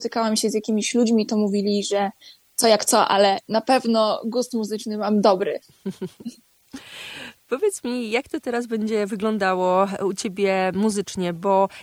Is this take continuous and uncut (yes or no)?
yes